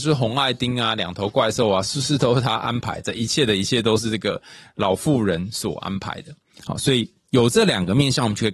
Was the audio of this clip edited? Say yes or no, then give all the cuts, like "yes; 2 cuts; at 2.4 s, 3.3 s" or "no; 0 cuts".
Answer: yes; 1 cut; at 6.6 s